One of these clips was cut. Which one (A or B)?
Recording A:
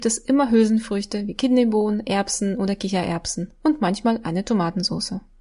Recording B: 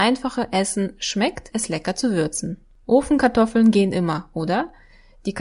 B